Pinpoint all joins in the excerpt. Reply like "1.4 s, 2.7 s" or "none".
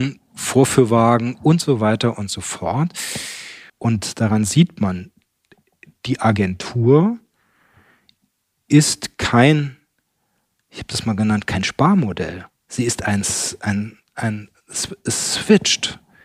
3.7 s